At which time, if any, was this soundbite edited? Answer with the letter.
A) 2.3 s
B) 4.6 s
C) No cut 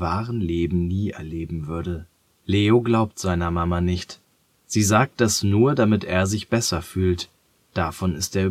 A